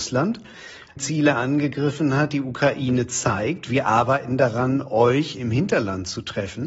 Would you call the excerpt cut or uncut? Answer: uncut